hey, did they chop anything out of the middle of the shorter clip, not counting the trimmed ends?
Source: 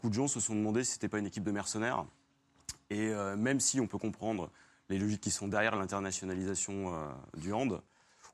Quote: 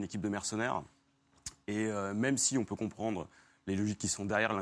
no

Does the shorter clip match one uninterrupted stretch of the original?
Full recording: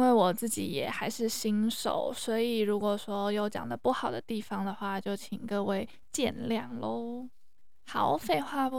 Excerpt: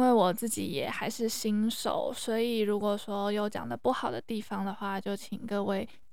yes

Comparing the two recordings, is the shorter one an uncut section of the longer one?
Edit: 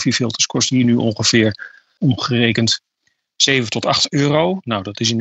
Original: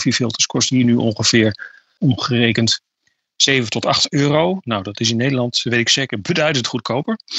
yes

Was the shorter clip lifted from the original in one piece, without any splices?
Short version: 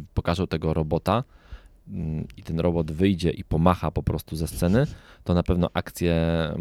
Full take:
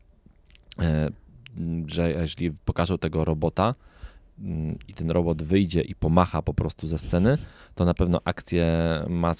yes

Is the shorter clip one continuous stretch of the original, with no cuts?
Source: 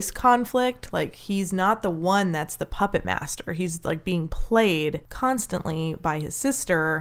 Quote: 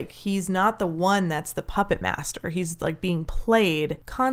yes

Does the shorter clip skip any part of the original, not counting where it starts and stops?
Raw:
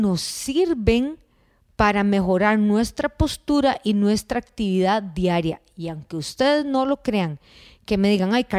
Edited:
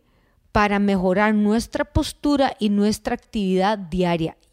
no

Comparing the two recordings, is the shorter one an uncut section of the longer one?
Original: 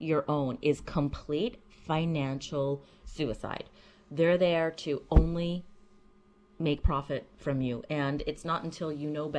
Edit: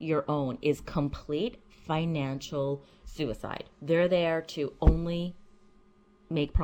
no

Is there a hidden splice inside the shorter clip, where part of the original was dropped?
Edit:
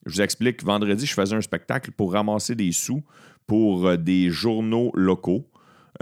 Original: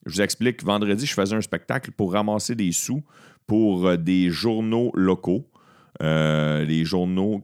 no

